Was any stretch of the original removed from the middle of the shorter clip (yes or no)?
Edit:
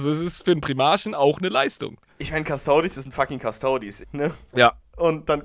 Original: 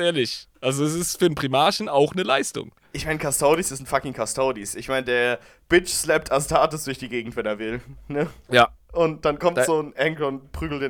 yes